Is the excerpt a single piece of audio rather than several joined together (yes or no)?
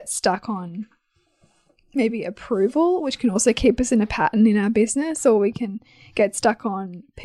yes